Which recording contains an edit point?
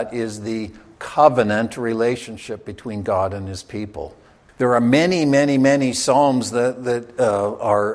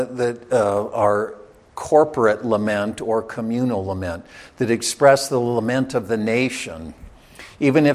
first; 1 cut; at 4.5 s

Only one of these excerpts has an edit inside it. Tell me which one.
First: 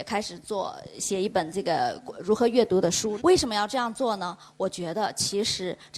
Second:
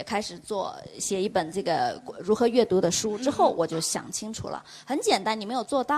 first; 1 cut; at 3.2 s

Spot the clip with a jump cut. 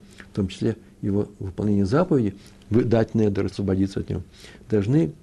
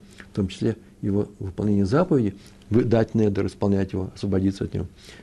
first; 1 cut; at 3.5 s

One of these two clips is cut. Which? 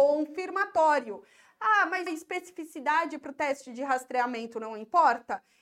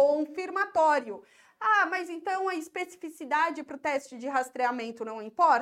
first; 1 cut; at 2.1 s

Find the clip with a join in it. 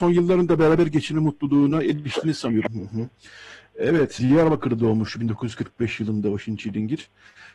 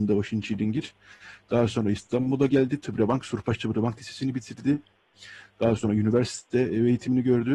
first; 2 cuts; at 2.7 s, 4.2 s

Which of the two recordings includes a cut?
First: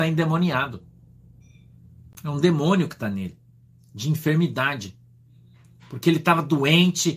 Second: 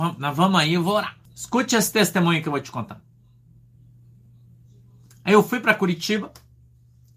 second; 1 cut; at 1.2 s

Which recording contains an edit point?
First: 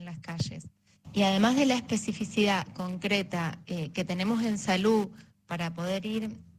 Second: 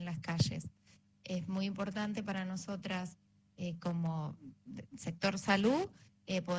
first; 1 cut; at 1.0 s

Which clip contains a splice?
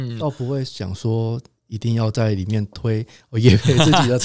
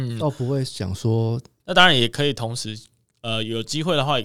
second; 1 cut; at 1.6 s

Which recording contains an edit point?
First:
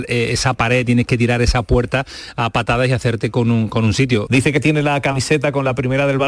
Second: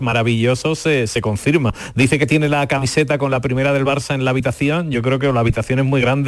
first; 1 cut; at 4.3 s

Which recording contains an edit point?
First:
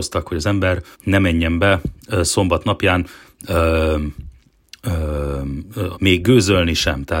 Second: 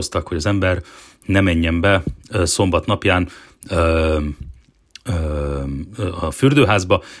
first; 2 cuts; at 0.9 s, 5.9 s

